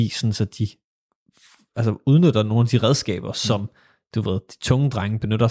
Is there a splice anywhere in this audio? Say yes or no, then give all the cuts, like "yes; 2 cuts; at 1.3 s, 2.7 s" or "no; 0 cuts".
no; 0 cuts